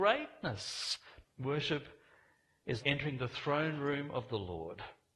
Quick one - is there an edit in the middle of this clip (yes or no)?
yes